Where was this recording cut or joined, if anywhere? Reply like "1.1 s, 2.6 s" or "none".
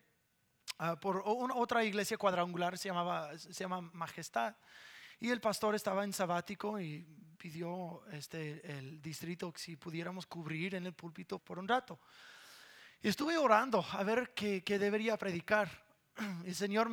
11.4 s

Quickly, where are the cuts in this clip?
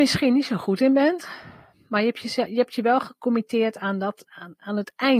4.3 s

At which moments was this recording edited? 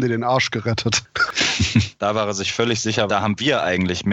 2.0 s, 3.1 s

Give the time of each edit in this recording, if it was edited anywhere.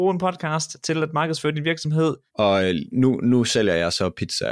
2.3 s

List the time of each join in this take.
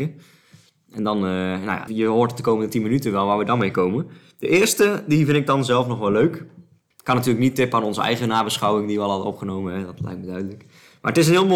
1.9 s, 6.9 s

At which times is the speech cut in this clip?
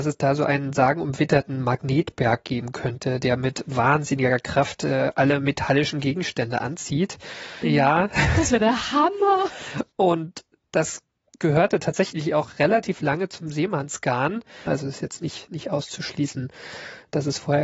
7.6 s, 14.7 s

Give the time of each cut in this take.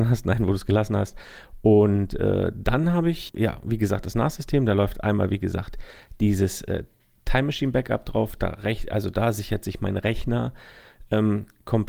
3.3 s

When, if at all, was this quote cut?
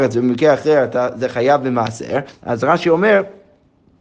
2.3 s

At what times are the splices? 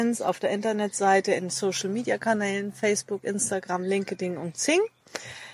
none

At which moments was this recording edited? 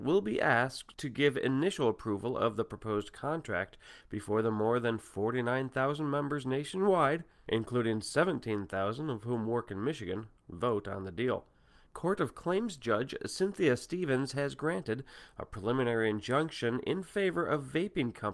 11.9 s

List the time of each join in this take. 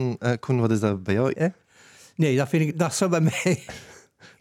1.3 s

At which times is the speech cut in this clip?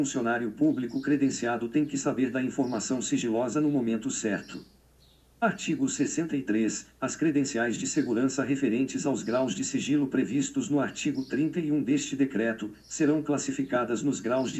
none

